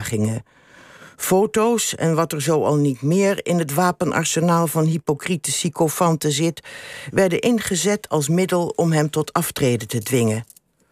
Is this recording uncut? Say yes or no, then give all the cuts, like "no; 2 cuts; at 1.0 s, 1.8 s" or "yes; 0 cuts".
yes; 0 cuts